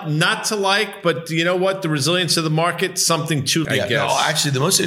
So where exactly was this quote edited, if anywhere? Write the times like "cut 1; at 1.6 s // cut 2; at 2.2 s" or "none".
cut 1; at 3.6 s